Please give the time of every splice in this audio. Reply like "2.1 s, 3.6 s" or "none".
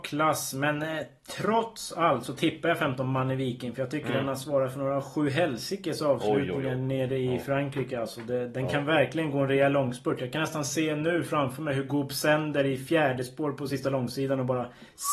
none